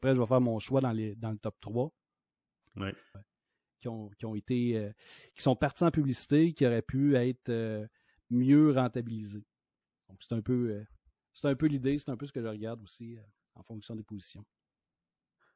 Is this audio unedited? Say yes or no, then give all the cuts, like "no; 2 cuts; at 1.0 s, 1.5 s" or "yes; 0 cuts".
no; 1 cut; at 3.1 s